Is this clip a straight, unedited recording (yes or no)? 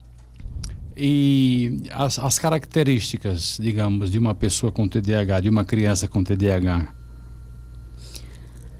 yes